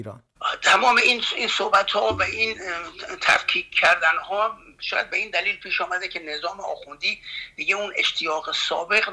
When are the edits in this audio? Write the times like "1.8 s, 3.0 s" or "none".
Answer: none